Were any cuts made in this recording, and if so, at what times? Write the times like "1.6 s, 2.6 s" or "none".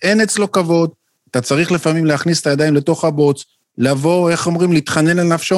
none